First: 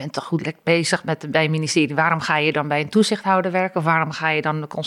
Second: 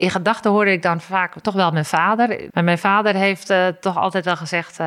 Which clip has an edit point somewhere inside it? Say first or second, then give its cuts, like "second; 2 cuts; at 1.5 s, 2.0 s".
second; 1 cut; at 2.5 s